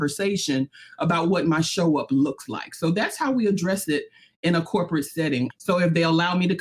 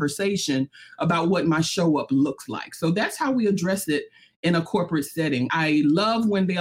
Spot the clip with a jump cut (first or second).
first